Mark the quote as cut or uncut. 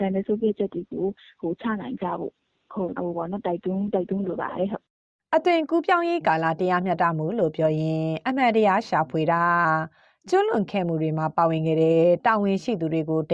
cut